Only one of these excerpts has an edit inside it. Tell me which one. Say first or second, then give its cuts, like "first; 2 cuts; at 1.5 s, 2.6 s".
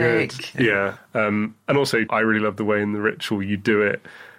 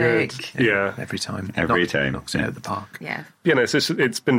first; 2 cuts; at 1.0 s, 2.1 s